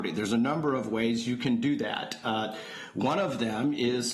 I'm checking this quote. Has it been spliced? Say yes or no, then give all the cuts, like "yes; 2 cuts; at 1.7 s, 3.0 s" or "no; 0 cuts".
no; 0 cuts